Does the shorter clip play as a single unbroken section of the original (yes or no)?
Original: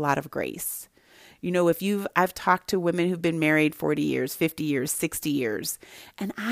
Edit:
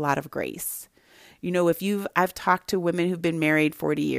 yes